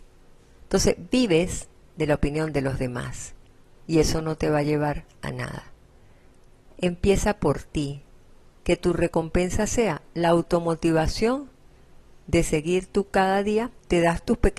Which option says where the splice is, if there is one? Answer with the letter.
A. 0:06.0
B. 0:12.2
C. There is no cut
C